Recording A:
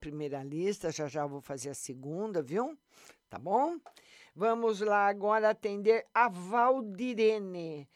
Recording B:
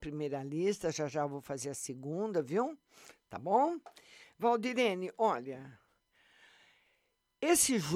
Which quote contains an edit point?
B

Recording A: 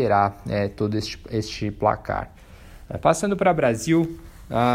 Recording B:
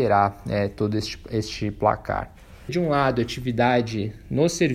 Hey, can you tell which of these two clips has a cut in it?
B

